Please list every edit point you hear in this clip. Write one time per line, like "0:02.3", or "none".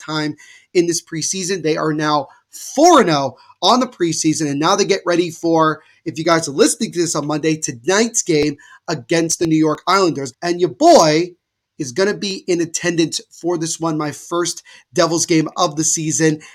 0:10.3

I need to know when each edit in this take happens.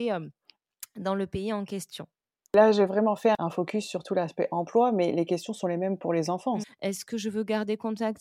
0:06.6

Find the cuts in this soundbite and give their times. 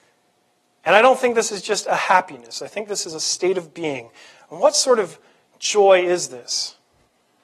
none

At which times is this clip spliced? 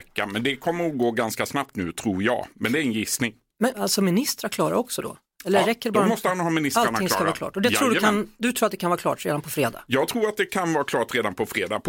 0:03.7

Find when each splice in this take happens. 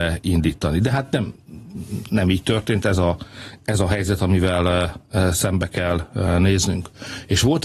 none

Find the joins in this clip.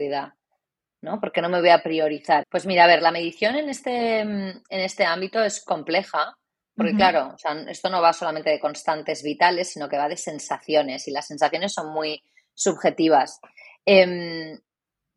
0:02.4

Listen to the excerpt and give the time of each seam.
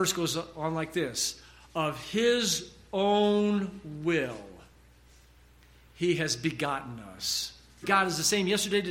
0:07.8

